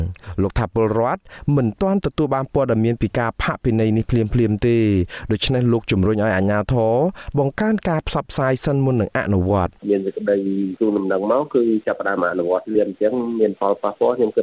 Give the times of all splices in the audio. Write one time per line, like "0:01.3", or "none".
0:09.8